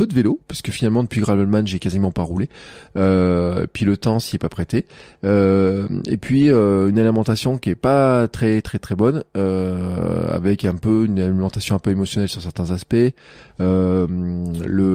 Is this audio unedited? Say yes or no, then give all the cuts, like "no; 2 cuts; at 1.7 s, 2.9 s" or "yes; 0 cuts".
no; 1 cut; at 8.8 s